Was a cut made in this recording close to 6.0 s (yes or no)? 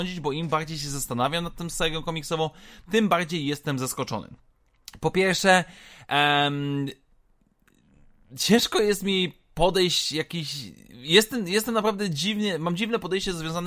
no